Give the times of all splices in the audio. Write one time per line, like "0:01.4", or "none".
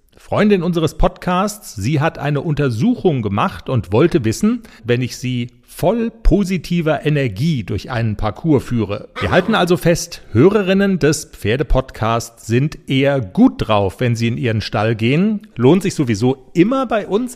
0:04.8
0:09.2
0:15.5

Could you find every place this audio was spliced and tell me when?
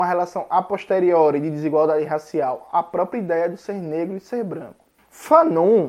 none

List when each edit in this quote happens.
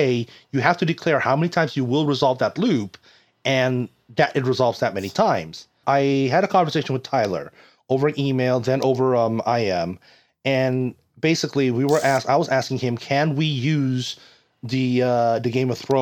0:05.8

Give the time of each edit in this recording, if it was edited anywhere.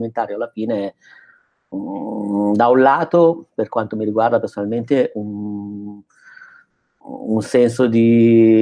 none

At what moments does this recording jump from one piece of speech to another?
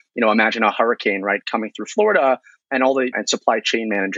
0:03.1

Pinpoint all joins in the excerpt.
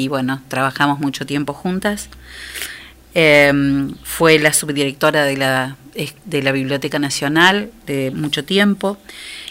0:08.1

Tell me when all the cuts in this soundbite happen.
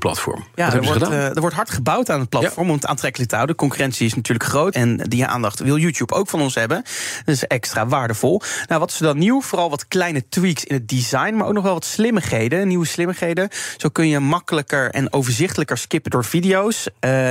0:04.7

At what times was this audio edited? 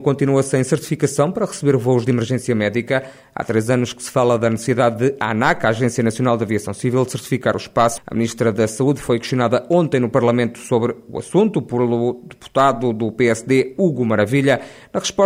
0:08.0

